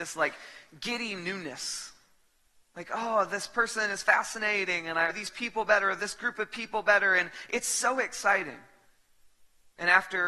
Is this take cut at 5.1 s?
yes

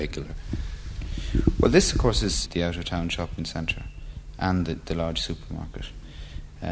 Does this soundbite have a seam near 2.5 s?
yes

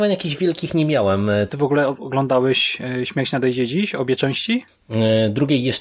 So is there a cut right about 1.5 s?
yes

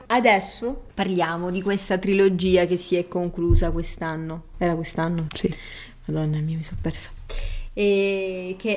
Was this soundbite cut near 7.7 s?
no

